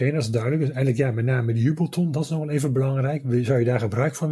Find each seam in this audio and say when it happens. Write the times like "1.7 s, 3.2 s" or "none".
none